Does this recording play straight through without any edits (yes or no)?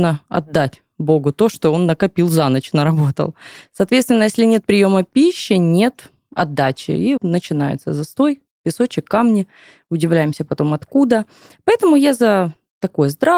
no